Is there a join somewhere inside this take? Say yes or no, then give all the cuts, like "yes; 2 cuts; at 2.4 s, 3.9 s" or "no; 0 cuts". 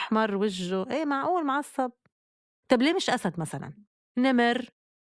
no; 0 cuts